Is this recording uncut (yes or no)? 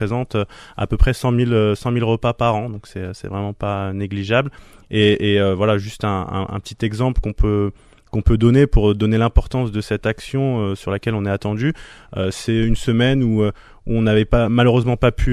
yes